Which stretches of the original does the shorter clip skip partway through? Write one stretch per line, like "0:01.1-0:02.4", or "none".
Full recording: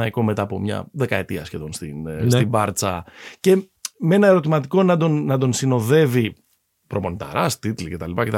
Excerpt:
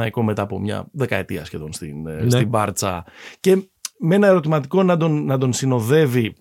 none